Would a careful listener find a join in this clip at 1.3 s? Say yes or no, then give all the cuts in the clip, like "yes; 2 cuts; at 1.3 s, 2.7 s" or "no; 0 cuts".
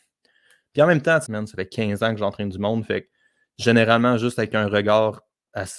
yes; 1 cut; at 1.3 s